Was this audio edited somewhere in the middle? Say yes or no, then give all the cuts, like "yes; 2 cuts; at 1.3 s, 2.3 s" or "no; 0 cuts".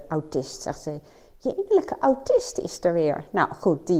no; 0 cuts